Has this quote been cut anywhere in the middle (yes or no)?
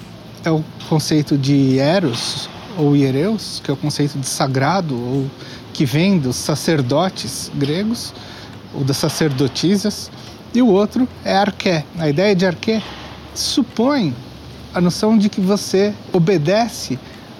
no